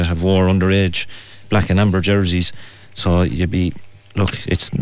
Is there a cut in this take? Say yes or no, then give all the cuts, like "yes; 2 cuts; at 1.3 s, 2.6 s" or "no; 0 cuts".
no; 0 cuts